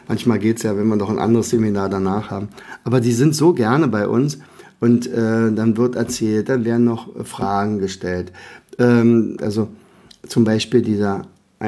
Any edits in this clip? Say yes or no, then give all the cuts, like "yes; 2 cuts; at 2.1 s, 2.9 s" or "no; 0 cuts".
yes; 1 cut; at 9.4 s